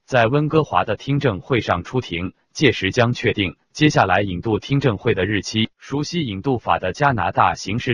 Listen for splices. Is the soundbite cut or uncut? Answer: cut